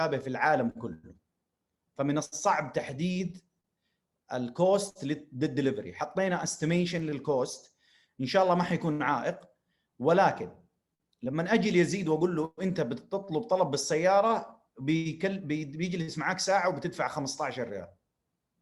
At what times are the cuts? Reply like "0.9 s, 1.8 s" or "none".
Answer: none

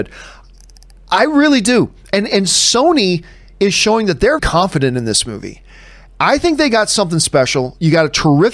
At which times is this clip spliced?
4.4 s

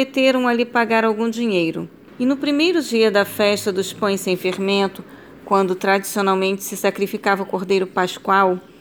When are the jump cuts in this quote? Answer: 2.1 s

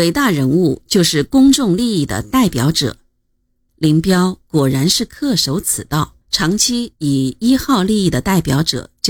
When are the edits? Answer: 3.7 s, 6.2 s

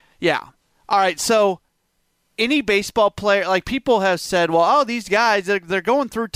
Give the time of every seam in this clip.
none

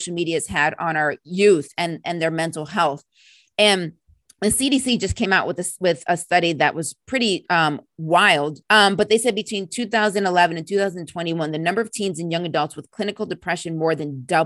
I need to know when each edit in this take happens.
8.6 s

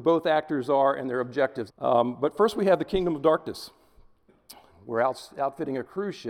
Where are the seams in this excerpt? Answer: 1.7 s, 4.7 s

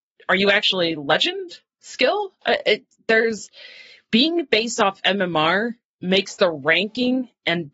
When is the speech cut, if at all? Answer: none

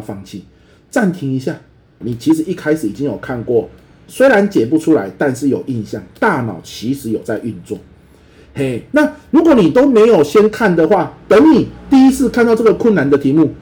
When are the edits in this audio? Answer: 2.0 s

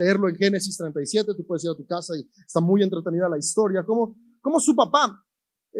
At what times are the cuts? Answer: none

